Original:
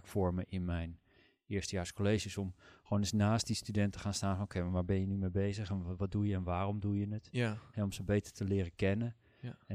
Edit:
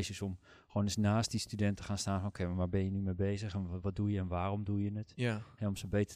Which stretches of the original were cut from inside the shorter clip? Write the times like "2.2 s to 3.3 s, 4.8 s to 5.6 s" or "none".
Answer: none